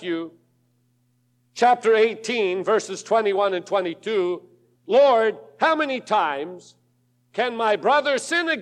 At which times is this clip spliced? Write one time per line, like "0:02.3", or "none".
0:04.8